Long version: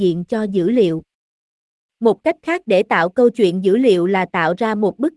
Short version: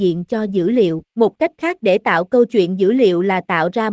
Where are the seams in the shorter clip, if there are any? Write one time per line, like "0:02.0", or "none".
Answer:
0:01.1

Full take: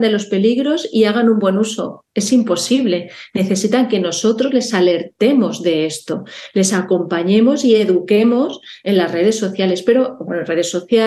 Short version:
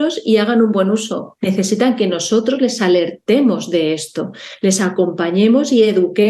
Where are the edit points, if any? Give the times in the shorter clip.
0:01.4

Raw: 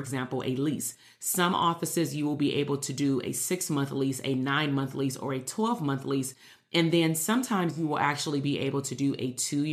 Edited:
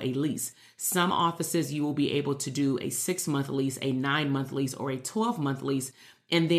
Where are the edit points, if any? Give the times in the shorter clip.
none

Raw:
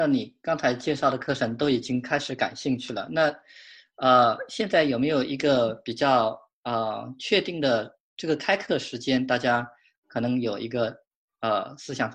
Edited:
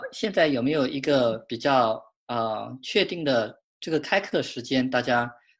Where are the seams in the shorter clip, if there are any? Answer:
none

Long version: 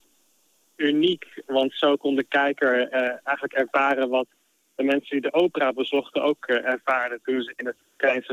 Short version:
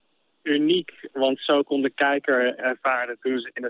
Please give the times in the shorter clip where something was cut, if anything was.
0:02.6

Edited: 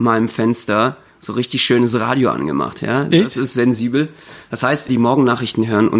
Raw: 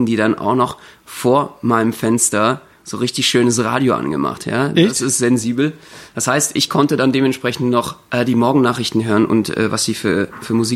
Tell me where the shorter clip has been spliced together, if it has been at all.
0:04.9

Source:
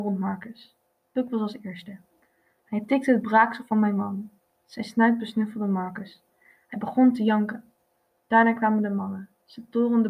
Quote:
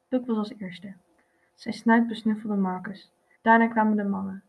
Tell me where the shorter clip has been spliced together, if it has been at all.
0:01.5
0:03.3

